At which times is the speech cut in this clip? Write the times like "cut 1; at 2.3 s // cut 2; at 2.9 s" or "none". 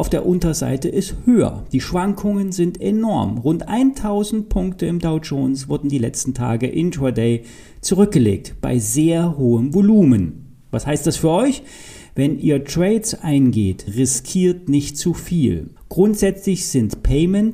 cut 1; at 13.9 s // cut 2; at 15.8 s